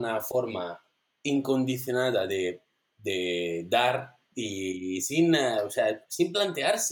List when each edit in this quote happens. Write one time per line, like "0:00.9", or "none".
none